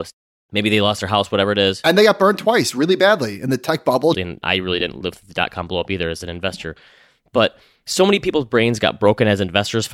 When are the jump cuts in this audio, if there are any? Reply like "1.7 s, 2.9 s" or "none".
4.1 s